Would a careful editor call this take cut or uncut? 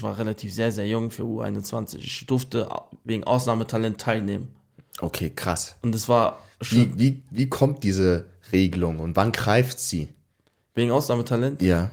uncut